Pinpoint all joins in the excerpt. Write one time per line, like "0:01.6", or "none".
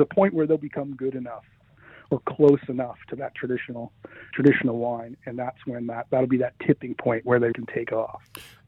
0:04.3
0:07.5

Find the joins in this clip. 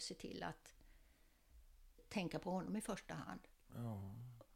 0:02.0

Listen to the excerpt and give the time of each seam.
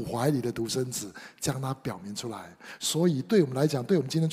none

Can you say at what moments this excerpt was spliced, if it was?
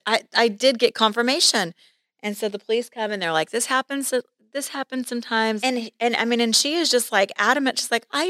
0:05.6

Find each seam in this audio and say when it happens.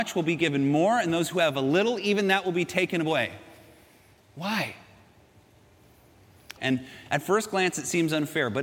0:06.6

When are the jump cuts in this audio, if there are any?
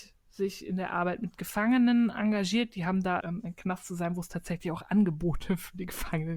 0:03.2

